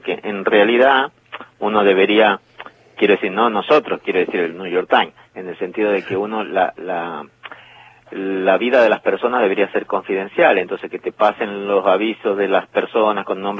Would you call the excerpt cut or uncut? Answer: uncut